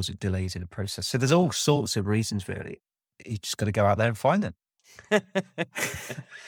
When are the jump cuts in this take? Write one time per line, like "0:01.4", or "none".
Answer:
none

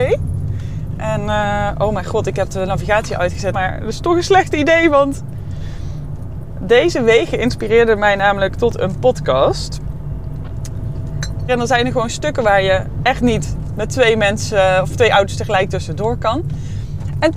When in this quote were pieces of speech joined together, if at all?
0:03.5
0:11.5
0:13.0

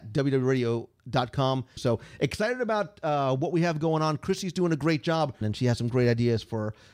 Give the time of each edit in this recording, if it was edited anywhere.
0:01.8
0:05.4

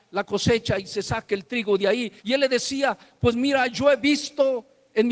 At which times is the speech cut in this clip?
0:02.2

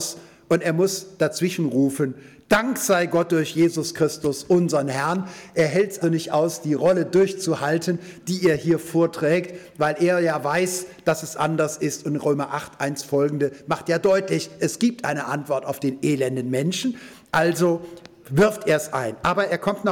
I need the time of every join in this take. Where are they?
0:06.0

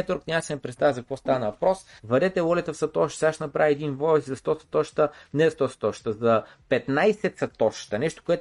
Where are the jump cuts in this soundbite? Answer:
0:02.0

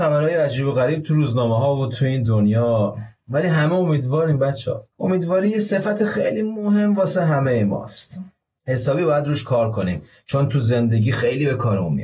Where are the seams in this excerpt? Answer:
0:04.9

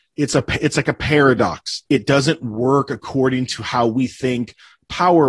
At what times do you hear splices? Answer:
0:01.9

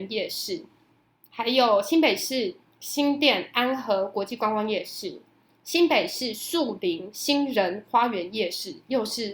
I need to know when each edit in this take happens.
none

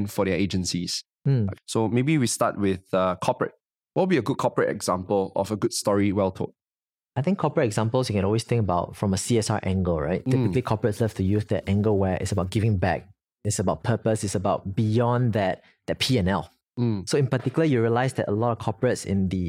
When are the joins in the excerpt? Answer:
0:01.5

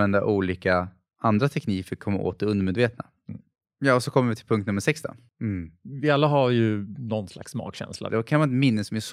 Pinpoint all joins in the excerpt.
0:05.3
0:08.1

